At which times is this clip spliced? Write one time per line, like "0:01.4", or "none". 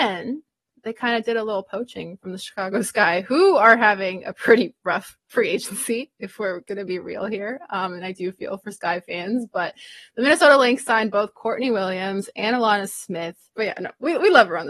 0:13.5